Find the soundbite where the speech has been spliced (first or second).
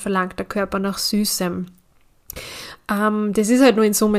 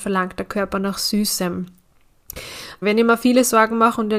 second